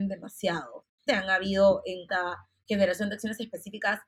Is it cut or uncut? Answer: cut